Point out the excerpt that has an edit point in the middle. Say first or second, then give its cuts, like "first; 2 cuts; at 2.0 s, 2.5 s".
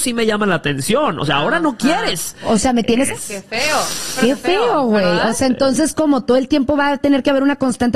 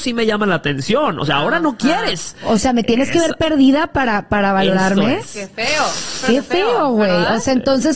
first; 1 cut; at 3.1 s